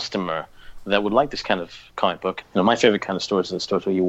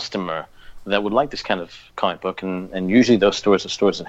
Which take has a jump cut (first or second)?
first